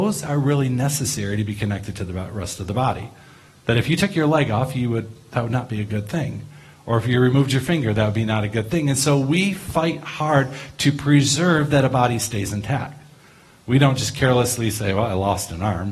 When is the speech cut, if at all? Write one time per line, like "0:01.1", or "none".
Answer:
none